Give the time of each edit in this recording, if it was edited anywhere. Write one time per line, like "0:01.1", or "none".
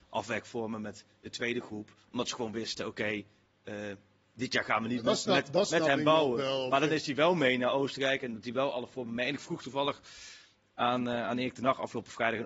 none

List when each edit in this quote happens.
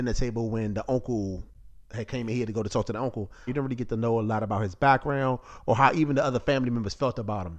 0:03.5

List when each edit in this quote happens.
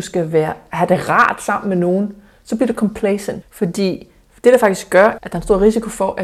0:03.4
0:05.2

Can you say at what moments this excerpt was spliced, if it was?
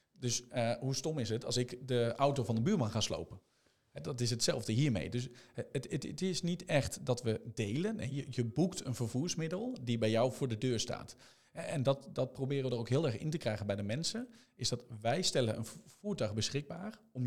none

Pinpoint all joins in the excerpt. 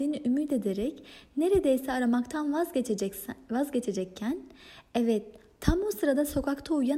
none

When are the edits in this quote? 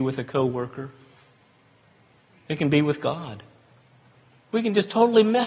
none

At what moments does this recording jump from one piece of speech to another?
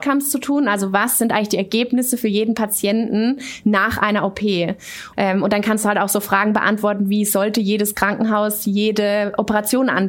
0:05.1

